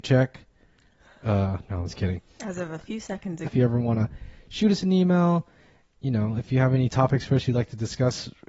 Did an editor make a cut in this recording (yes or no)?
yes